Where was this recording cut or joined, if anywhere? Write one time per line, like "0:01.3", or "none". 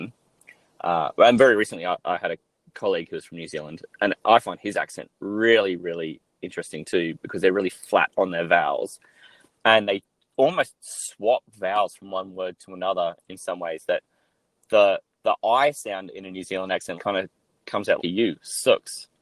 0:17.0
0:18.0